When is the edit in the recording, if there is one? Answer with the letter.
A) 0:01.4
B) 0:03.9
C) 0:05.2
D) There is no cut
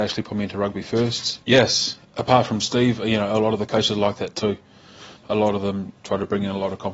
A